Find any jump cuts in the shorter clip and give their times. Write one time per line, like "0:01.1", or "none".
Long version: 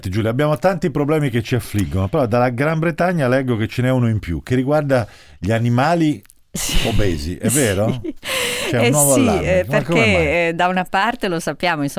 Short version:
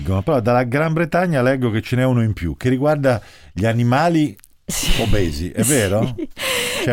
none